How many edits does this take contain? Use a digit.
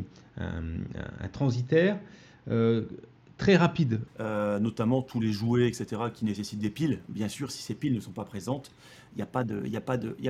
1